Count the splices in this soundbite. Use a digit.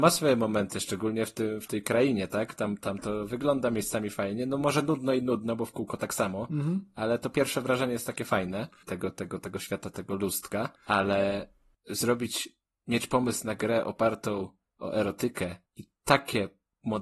3